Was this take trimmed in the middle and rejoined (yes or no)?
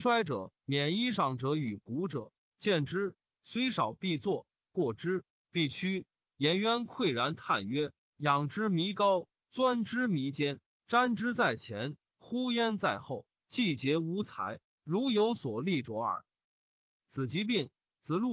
yes